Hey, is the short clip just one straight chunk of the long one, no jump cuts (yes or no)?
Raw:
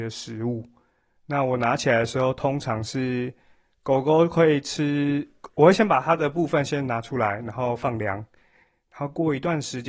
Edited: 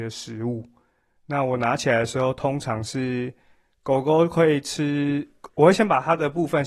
yes